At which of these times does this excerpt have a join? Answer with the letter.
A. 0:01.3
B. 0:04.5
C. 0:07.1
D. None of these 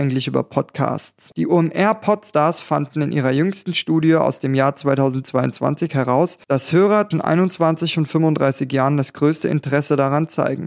C